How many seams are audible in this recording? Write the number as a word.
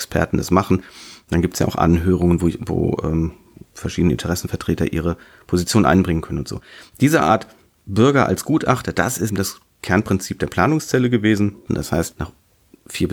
two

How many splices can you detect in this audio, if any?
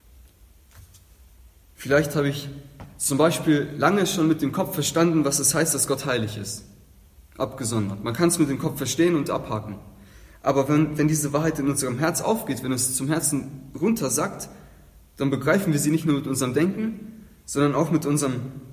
zero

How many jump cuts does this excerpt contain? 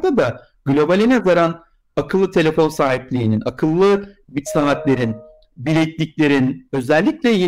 zero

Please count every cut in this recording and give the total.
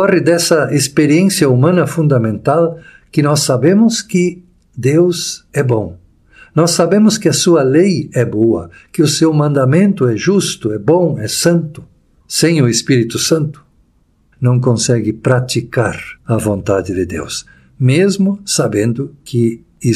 three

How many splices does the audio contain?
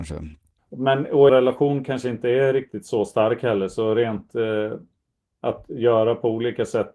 one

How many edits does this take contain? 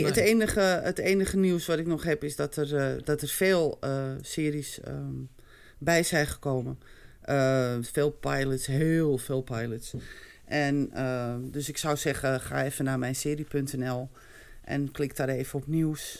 one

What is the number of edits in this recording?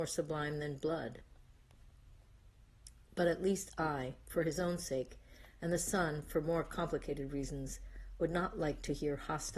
zero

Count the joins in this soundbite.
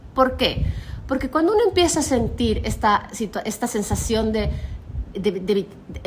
one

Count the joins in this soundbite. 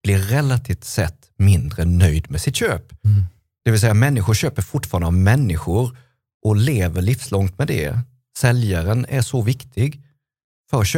zero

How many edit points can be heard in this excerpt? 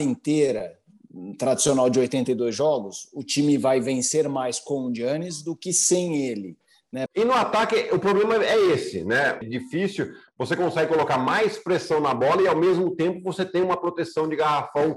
two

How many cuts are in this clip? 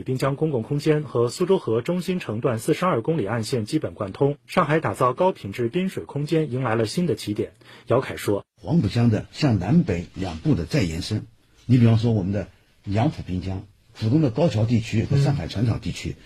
zero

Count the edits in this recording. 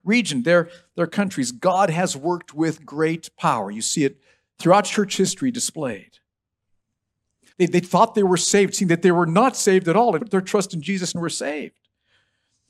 two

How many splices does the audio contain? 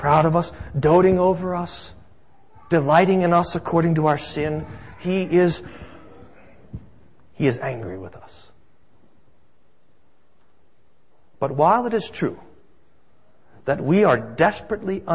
zero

